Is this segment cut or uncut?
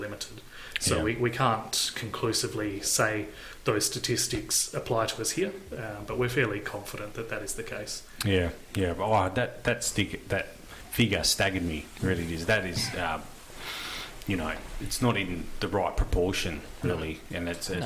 uncut